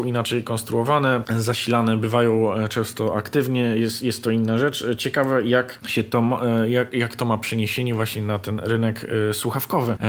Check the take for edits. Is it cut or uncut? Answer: uncut